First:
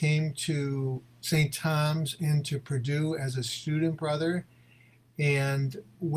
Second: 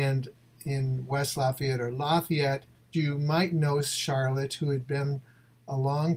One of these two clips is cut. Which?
second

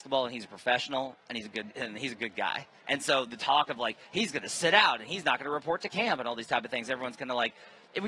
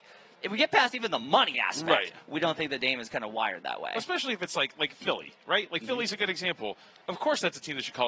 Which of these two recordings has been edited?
first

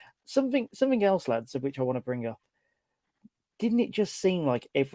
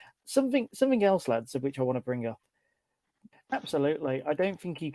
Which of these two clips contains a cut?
second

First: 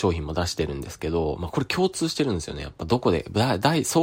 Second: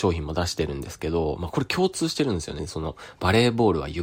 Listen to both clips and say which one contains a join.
second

